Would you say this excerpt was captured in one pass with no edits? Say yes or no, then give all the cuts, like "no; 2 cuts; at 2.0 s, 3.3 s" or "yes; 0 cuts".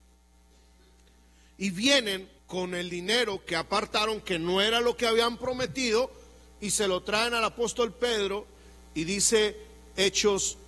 no; 1 cut; at 2.4 s